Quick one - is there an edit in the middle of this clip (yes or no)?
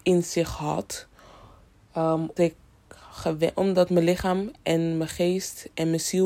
yes